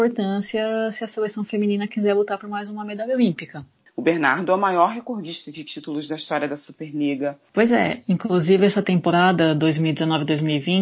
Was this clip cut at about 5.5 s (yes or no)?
no